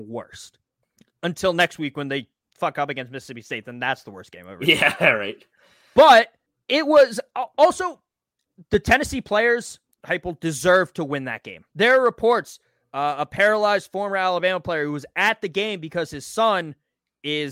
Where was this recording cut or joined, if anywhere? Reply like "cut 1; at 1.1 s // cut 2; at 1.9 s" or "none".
cut 1; at 9.9 s // cut 2; at 11.7 s